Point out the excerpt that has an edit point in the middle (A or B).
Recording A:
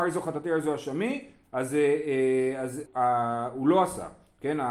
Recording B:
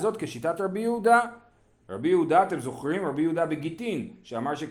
A